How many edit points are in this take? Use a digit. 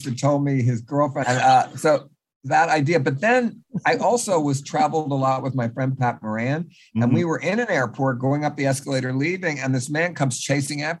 1